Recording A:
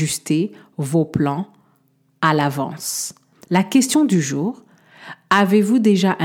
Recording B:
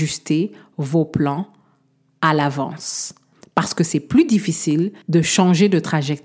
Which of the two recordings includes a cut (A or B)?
A